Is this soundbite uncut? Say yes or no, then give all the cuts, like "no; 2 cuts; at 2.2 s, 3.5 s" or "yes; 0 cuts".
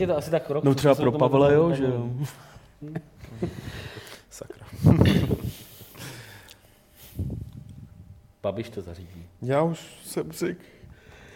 yes; 0 cuts